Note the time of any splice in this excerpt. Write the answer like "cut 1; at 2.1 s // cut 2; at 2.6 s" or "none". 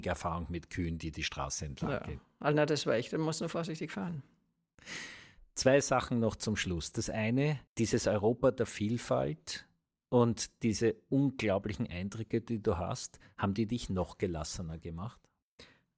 cut 1; at 7.7 s